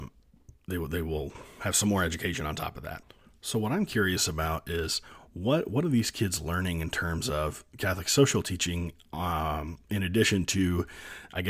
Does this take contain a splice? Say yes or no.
no